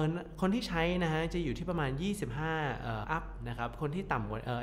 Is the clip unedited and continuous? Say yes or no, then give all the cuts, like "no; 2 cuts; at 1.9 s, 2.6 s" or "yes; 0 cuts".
no; 1 cut; at 3.0 s